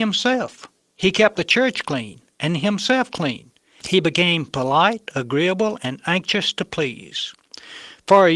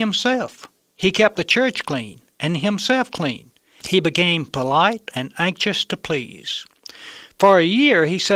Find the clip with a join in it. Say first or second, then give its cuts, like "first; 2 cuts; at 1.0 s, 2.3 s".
second; 1 cut; at 5.1 s